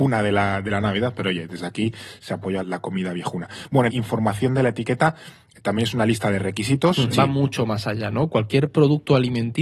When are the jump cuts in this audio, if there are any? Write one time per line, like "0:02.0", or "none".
0:02.6
0:03.9
0:07.1